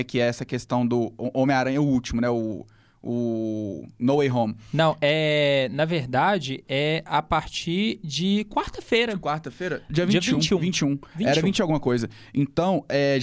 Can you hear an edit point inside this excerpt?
no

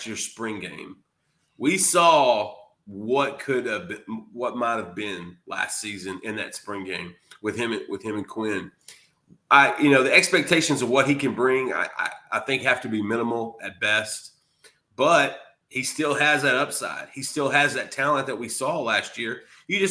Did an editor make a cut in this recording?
no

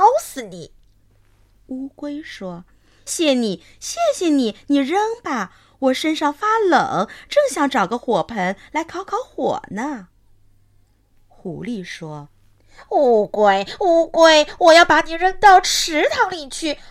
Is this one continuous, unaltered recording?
no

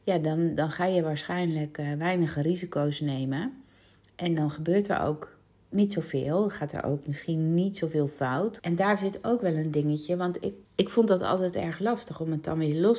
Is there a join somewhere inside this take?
yes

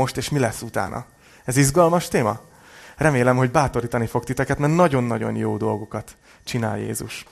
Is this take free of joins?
yes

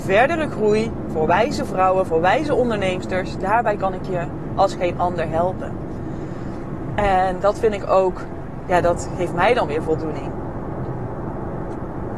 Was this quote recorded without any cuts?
yes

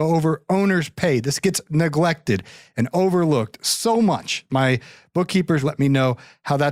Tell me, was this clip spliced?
yes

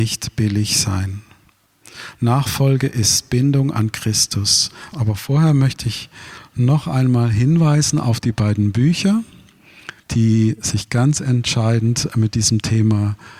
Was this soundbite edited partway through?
yes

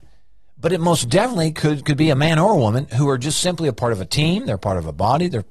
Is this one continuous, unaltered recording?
yes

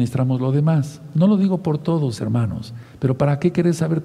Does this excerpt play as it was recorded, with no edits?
yes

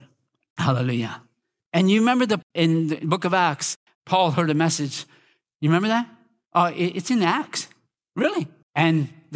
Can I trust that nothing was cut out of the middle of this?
no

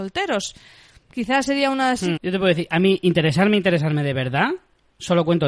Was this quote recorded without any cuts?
no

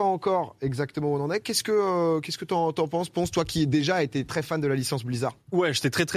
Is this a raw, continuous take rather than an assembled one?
yes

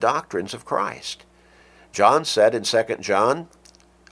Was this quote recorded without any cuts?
yes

